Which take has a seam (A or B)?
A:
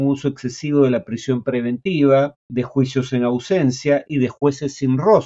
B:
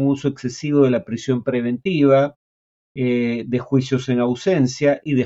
A